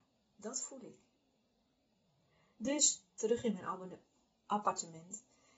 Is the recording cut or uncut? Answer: uncut